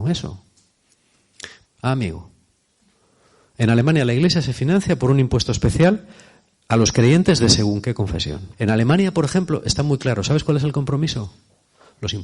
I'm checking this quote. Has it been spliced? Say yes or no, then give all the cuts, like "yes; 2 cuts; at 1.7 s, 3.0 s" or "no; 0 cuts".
yes; 2 cuts; at 1.6 s, 8.5 s